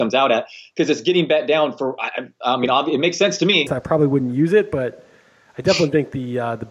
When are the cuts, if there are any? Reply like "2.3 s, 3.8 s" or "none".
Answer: 3.7 s

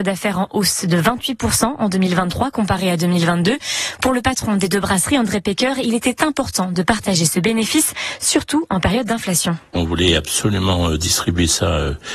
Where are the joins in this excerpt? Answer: none

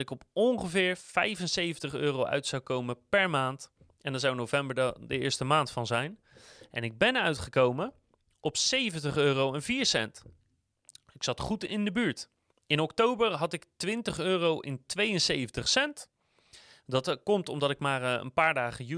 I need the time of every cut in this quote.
12.5 s

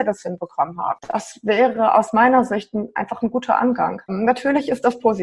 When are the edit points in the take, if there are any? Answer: 4.1 s

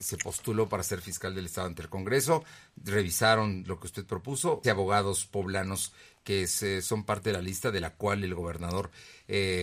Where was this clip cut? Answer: 4.6 s

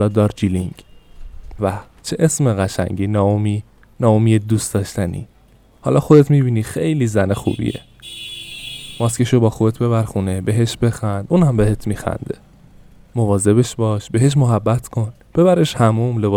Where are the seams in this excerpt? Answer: 1.6 s

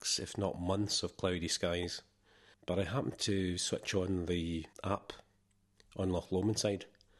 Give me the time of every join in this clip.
2.5 s, 4.7 s

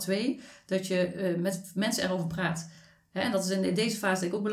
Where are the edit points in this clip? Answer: none

